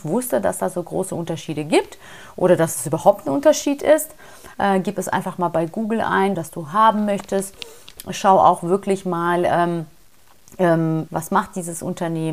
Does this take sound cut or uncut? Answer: cut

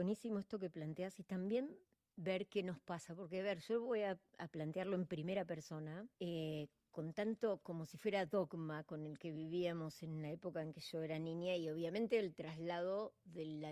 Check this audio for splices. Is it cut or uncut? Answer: cut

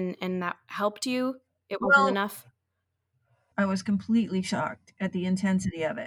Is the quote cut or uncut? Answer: cut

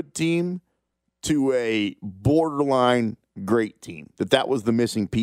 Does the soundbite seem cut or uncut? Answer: uncut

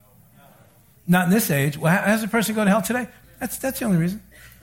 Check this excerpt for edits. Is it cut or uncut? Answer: cut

